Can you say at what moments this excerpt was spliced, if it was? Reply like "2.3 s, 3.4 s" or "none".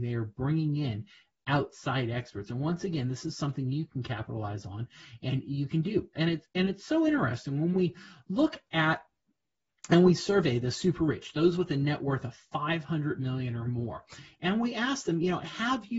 none